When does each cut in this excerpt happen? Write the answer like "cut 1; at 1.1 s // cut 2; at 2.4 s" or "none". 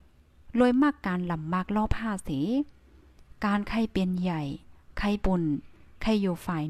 cut 1; at 5.2 s